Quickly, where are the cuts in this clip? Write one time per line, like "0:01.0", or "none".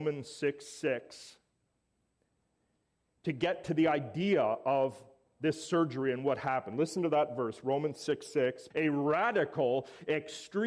0:08.7

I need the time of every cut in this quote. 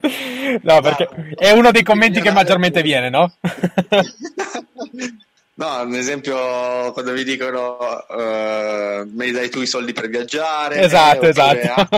none

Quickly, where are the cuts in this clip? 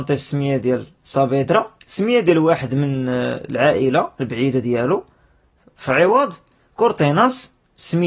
0:01.8

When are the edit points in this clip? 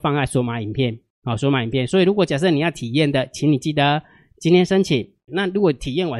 0:05.3

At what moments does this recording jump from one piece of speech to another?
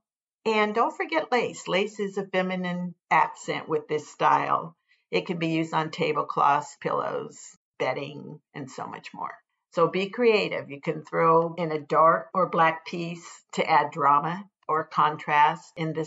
0:06.8
0:09.7

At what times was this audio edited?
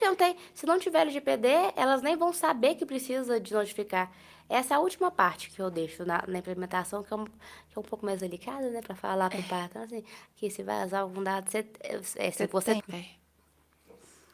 0:12.8

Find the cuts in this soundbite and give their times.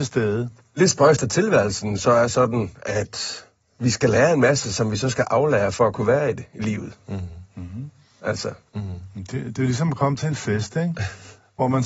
none

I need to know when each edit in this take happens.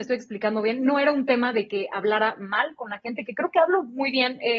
none

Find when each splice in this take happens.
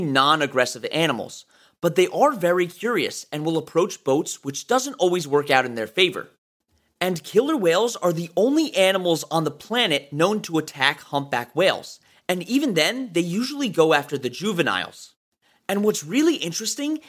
none

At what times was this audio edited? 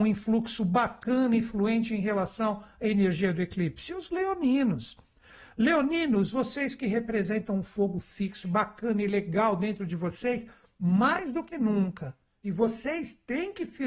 0:08.4
0:12.4

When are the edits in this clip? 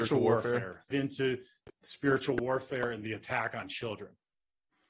0:00.9

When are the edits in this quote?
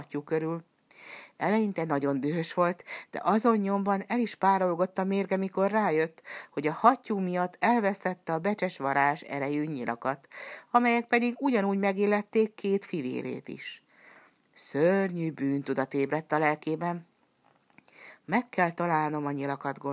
none

